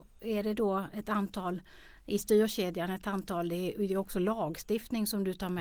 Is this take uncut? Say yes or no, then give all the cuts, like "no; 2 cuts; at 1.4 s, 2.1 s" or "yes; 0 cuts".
yes; 0 cuts